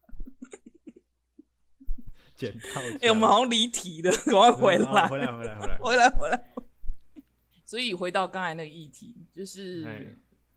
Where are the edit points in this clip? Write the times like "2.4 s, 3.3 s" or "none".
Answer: none

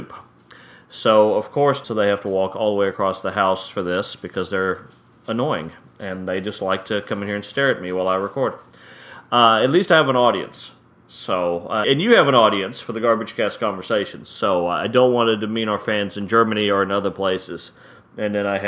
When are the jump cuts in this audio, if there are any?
1.8 s, 11.8 s

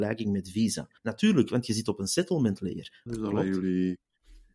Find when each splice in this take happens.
1.0 s, 3.1 s

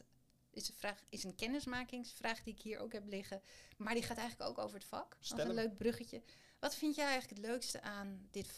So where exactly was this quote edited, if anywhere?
5.2 s

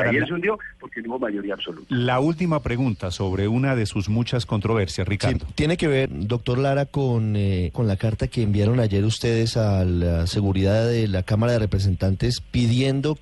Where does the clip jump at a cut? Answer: 6.1 s, 7.7 s

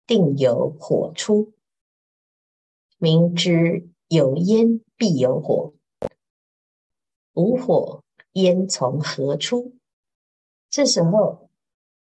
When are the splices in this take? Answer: 10.6 s

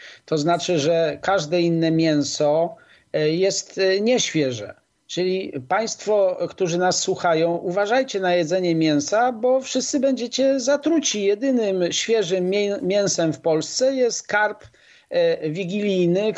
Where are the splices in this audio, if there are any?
none

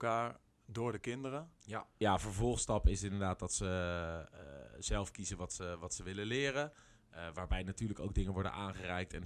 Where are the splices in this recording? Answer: 2.0 s

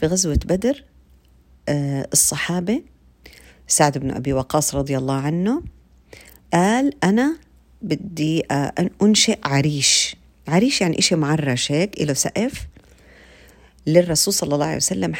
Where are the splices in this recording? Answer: none

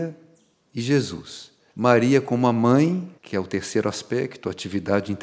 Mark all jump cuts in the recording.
1.7 s, 3.2 s

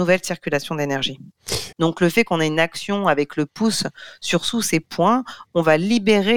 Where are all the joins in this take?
1.7 s

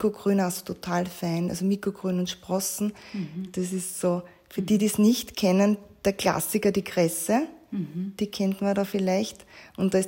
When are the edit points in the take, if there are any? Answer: none

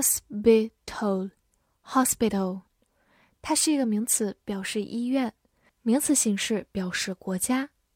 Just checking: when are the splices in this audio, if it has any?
5.7 s

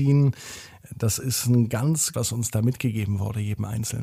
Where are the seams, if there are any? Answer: 2.1 s

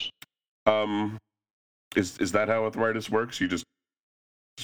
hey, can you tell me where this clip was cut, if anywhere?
none

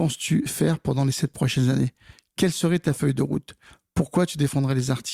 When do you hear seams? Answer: none

